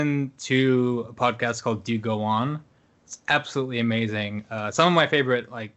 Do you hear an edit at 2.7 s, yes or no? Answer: no